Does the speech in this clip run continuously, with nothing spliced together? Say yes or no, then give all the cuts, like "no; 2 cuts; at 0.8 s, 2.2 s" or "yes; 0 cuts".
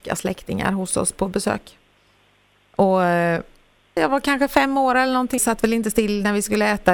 no; 2 cuts; at 4.0 s, 5.4 s